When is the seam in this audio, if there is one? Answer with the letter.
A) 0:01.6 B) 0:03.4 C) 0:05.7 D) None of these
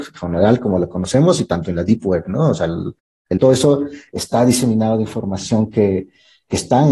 B